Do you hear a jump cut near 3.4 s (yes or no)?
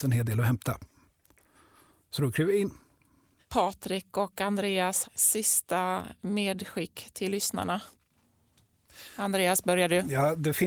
yes